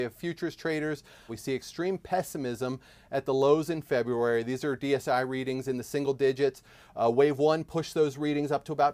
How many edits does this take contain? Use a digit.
1